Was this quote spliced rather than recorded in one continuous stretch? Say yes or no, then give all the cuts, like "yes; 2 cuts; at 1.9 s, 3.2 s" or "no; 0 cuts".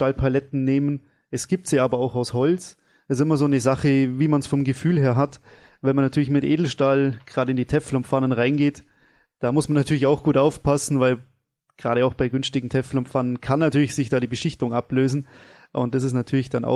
no; 0 cuts